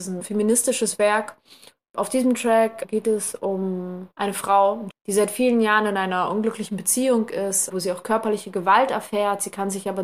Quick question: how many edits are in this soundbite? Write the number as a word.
two